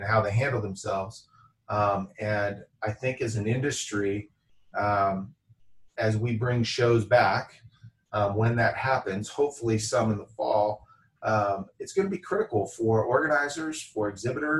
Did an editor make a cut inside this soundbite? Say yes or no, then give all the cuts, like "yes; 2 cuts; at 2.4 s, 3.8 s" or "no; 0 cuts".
no; 0 cuts